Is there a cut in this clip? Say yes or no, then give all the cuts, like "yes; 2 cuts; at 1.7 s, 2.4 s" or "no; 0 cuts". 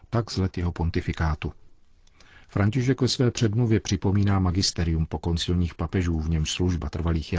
no; 0 cuts